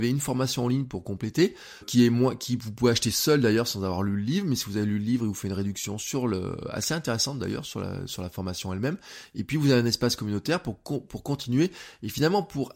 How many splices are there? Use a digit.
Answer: 1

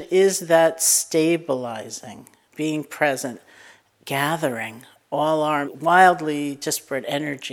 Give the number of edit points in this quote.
2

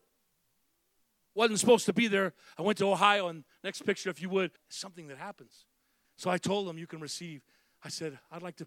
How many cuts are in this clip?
3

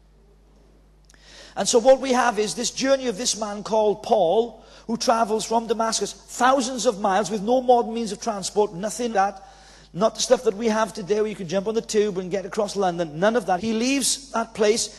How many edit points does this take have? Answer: 2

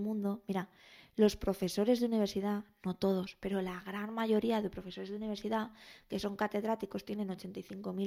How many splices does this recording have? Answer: 0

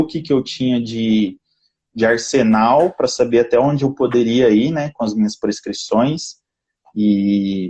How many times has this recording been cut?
0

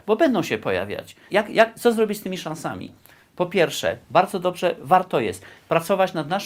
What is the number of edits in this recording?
1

